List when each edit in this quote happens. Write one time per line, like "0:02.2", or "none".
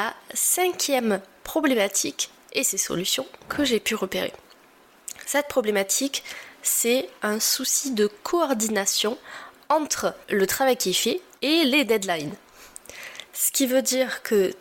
0:10.2

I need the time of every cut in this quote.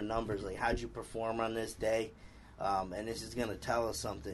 none

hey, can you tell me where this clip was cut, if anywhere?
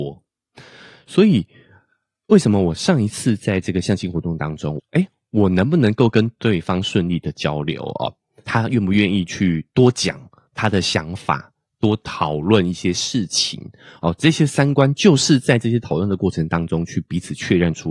0:04.8

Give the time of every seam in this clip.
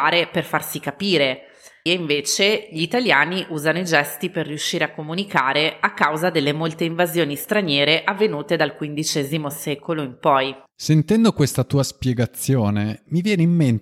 0:01.9

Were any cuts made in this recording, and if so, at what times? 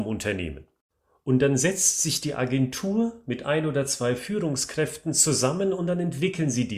none

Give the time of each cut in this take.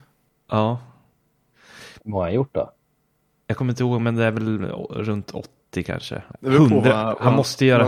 0:02.0
0:06.3

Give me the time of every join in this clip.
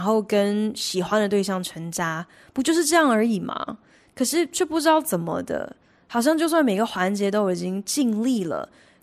none

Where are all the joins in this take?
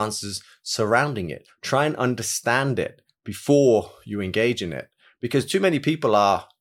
none

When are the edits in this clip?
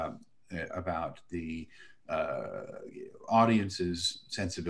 none

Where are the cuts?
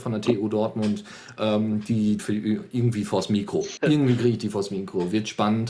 0:02.2
0:03.8

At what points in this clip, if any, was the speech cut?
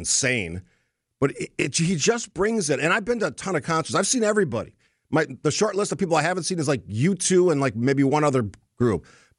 none

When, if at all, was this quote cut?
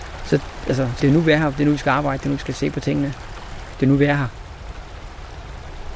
0:01.0
0:03.7

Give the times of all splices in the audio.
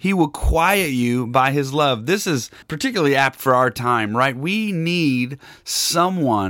0:02.6

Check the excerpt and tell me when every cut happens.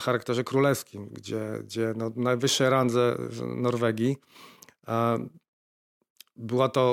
none

